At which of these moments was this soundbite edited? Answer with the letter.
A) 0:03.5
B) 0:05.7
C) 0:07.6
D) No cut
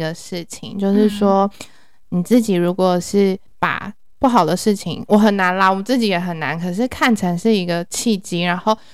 A